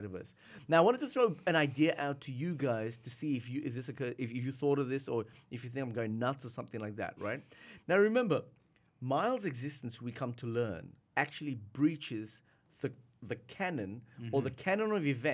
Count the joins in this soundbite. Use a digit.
1